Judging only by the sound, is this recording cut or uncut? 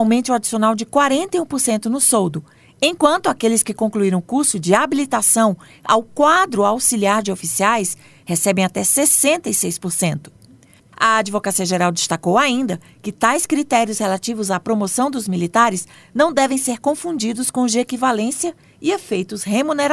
cut